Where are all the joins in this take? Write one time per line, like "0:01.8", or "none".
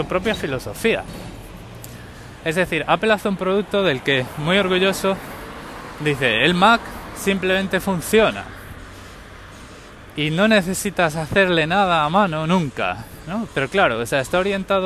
0:13.5